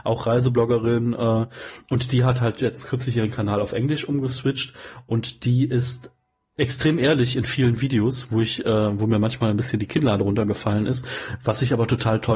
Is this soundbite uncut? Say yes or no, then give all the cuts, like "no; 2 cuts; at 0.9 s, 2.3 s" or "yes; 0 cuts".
yes; 0 cuts